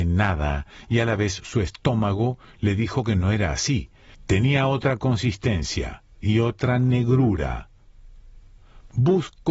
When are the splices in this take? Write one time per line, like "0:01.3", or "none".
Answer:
0:04.1
0:06.1